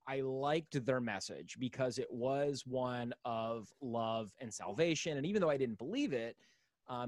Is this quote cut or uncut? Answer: uncut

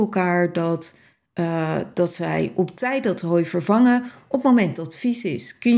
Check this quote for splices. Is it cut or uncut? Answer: uncut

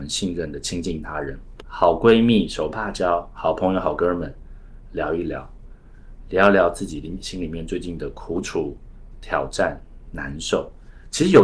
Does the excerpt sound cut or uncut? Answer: cut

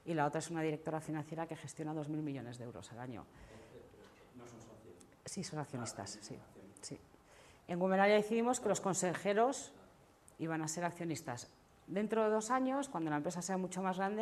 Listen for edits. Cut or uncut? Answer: uncut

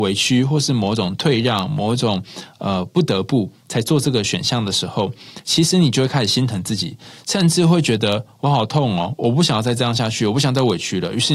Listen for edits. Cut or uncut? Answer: uncut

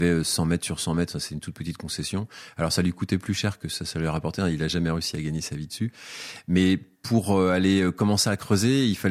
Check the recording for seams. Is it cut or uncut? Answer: uncut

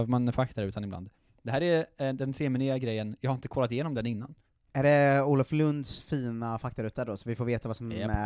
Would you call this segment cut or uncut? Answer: cut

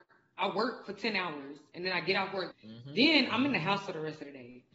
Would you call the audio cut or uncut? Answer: cut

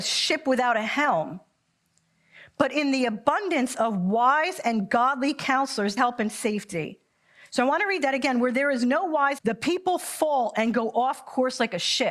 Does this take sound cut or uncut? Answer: cut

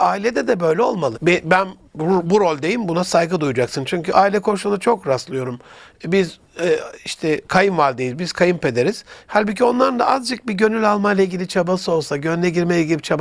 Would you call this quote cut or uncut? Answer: cut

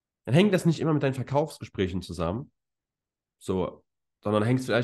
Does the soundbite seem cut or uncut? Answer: uncut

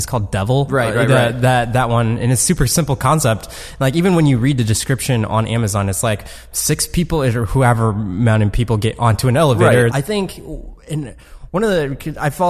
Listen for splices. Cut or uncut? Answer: cut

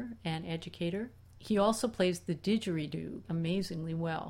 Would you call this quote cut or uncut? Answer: cut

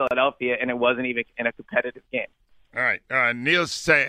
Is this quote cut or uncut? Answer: uncut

